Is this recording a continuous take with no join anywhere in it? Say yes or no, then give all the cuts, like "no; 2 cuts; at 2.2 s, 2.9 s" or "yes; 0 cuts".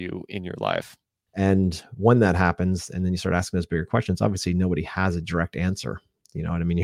no; 1 cut; at 1.3 s